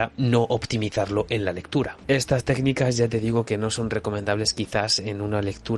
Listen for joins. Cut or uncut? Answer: cut